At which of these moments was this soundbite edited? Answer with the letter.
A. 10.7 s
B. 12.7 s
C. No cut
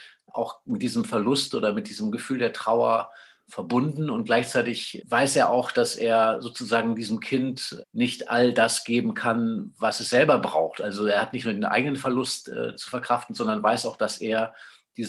C